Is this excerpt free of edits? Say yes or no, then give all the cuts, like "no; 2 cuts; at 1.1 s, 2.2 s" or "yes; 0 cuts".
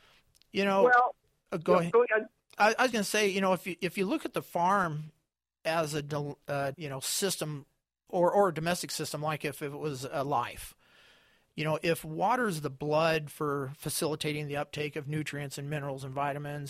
no; 2 cuts; at 2.9 s, 6.7 s